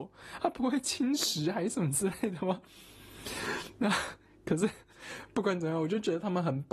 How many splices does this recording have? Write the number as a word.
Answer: zero